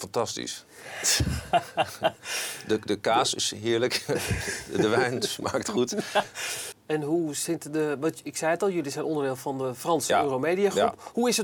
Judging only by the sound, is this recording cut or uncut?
cut